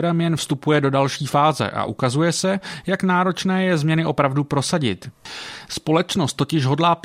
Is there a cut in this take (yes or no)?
no